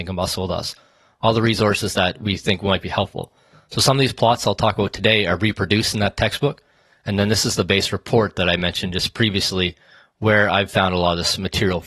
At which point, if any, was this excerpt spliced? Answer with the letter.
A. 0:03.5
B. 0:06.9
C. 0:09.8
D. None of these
D